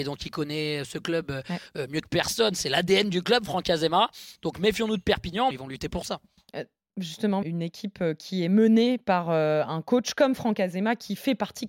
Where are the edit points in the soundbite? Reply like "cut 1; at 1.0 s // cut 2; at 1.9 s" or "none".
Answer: cut 1; at 5.5 s // cut 2; at 7.4 s